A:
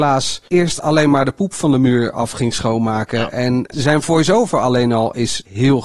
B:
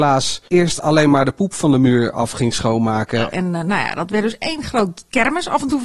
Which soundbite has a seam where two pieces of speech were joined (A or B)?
B